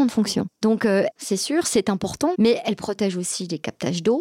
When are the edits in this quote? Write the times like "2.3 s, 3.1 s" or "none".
1.2 s, 2.3 s